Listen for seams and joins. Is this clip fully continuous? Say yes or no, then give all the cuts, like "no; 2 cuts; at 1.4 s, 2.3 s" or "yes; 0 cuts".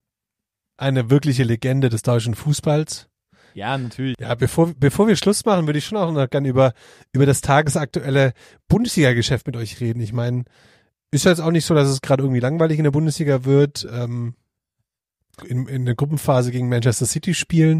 no; 1 cut; at 15.4 s